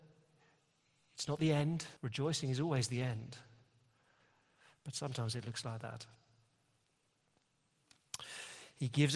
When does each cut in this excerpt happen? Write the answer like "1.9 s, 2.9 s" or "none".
2.0 s